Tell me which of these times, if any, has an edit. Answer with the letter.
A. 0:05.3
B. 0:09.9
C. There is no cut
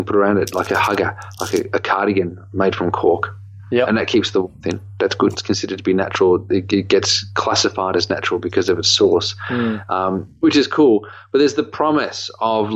A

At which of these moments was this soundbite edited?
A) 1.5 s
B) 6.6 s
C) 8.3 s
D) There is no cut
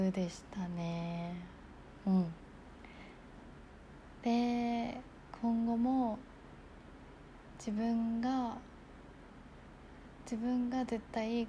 D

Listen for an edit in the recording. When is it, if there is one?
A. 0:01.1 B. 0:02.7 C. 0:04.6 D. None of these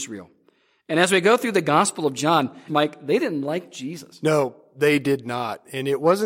B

